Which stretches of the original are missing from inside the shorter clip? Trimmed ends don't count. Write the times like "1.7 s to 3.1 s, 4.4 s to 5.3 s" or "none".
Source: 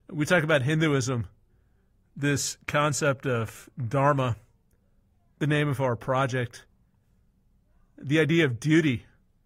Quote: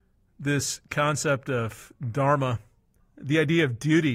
4.8 s to 7.8 s

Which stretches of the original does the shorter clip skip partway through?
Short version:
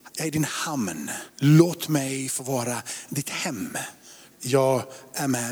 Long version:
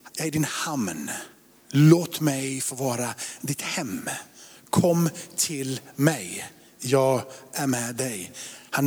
1.3 s to 1.6 s, 4.6 s to 6.7 s

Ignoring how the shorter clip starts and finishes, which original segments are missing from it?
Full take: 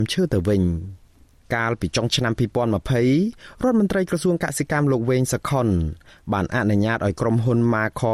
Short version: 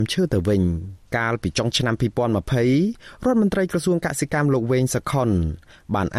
1.0 s to 1.4 s

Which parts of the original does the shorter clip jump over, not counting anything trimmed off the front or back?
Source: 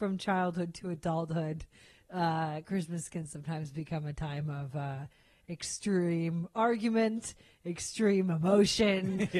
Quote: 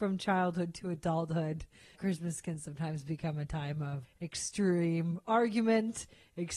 1.9 s to 2.6 s, 4.7 s to 5.3 s

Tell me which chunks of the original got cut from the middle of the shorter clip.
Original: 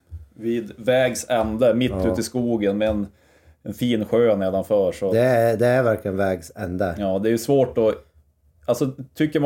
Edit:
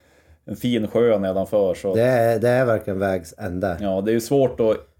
none

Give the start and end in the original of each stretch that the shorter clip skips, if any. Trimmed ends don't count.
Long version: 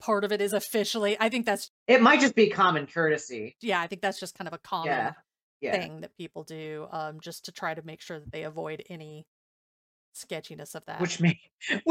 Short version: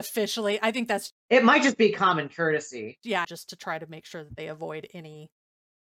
3.8 s to 7.2 s

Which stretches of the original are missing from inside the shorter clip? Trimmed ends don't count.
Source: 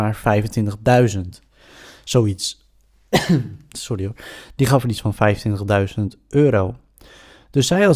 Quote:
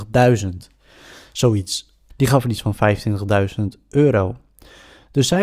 2.8 s to 4.5 s

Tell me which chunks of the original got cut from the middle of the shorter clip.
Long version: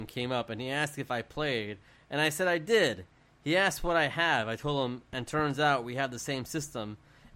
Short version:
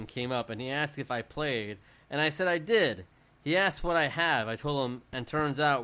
none

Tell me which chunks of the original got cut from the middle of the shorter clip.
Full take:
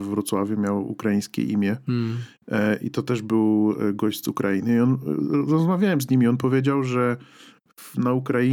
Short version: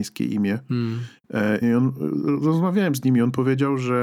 2.8 s to 4.7 s

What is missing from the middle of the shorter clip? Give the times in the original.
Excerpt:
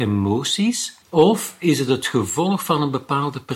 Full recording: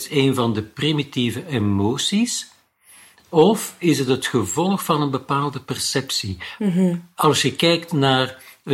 2.5 s to 3.2 s

